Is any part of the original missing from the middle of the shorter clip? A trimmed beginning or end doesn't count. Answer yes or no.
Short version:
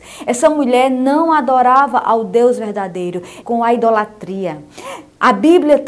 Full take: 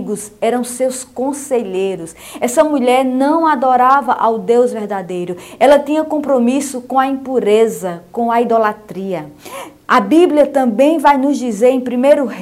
yes